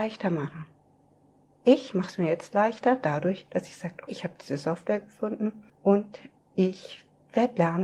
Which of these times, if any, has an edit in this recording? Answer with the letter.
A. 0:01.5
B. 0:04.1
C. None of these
B